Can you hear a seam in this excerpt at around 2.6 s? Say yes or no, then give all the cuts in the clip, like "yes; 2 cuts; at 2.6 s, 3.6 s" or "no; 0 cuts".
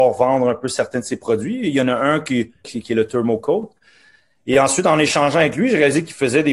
yes; 1 cut; at 2.6 s